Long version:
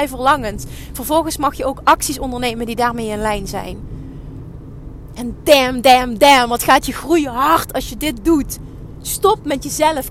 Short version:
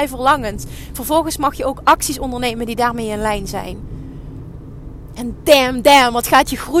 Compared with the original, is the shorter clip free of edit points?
no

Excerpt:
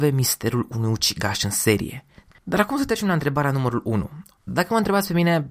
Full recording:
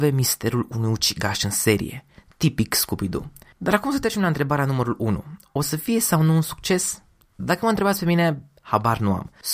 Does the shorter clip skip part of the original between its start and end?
yes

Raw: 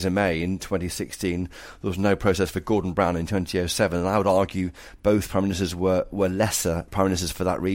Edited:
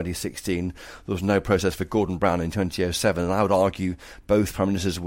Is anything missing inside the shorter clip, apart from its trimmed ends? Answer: no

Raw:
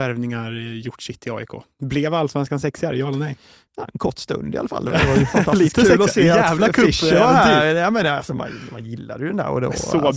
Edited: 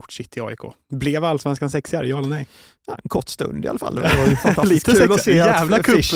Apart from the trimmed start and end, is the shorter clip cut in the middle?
no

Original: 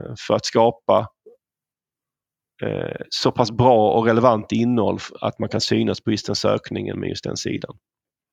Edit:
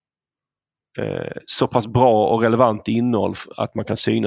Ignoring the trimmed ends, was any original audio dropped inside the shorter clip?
no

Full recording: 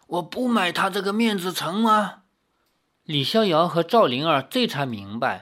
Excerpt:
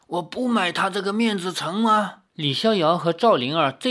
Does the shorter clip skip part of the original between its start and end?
yes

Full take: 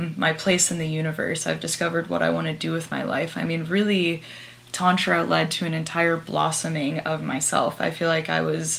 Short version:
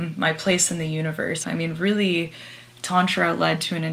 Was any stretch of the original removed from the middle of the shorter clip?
yes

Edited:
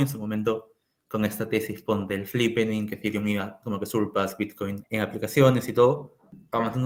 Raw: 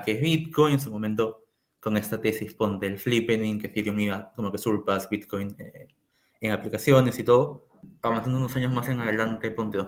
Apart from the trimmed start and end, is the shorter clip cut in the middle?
yes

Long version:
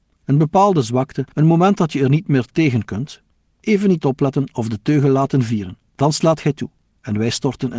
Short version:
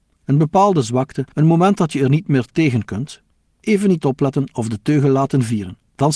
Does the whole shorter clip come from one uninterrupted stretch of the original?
yes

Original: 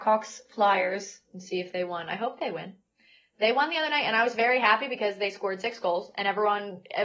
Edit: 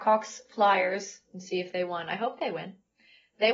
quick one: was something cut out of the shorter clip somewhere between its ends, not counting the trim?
no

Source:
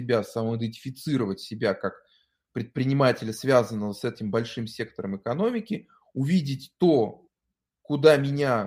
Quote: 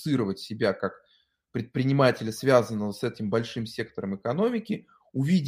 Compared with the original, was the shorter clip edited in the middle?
no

